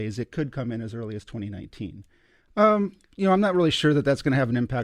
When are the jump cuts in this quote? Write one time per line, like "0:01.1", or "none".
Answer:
0:02.5